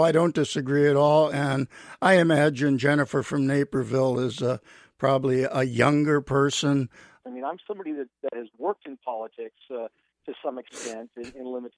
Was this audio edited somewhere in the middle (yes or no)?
yes